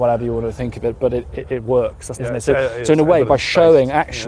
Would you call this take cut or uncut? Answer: cut